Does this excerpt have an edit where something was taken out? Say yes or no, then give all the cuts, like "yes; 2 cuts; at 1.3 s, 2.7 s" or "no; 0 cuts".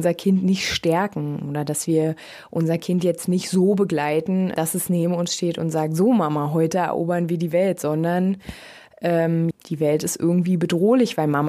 yes; 2 cuts; at 4.5 s, 9.5 s